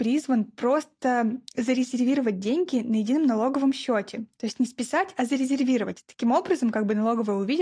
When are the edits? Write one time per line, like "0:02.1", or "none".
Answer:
none

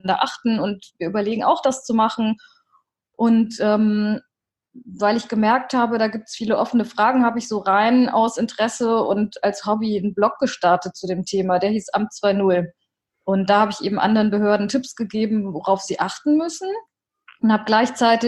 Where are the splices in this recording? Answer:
none

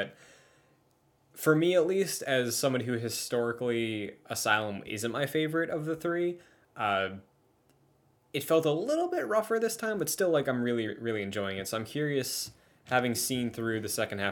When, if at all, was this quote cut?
none

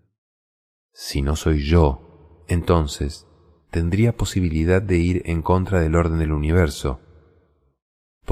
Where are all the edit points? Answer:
none

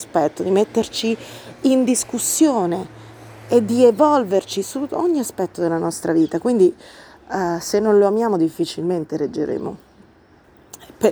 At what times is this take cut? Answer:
none

